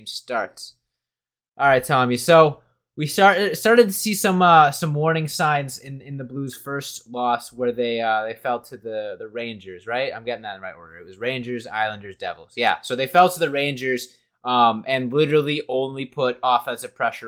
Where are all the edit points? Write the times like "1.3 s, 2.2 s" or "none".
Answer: none